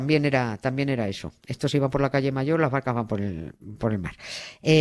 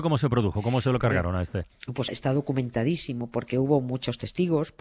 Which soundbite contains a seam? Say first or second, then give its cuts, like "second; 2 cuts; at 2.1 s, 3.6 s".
second; 1 cut; at 2.1 s